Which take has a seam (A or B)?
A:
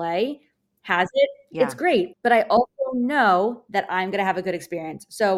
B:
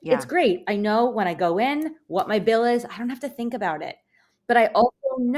A